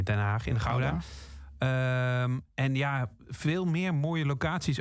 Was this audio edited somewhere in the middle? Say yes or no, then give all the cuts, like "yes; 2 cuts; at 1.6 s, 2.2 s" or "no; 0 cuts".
no; 0 cuts